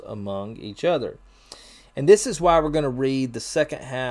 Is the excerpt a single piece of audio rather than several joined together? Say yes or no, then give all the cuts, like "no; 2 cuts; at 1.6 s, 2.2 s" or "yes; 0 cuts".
yes; 0 cuts